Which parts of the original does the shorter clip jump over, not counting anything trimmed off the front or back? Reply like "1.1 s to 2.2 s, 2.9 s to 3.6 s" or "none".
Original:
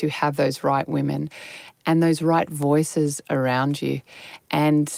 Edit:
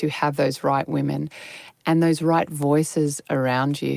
none